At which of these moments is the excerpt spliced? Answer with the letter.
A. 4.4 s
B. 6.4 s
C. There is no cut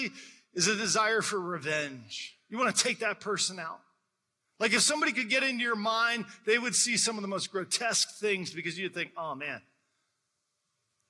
C